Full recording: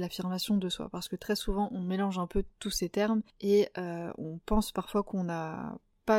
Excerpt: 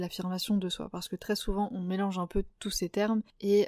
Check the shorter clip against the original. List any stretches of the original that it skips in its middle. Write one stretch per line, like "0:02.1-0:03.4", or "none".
none